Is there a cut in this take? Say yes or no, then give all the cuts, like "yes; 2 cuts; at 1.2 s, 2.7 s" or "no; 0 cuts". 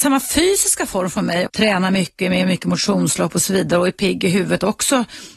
yes; 1 cut; at 1.5 s